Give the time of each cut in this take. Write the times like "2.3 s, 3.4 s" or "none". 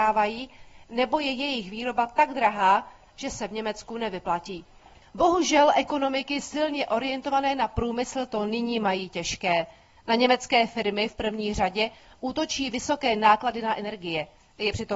5.0 s